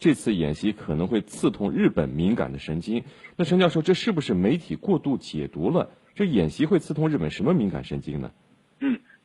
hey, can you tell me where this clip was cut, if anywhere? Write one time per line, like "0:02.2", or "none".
none